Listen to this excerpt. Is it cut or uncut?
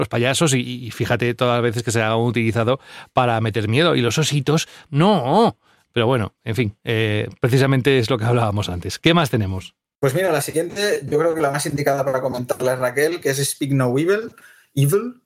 cut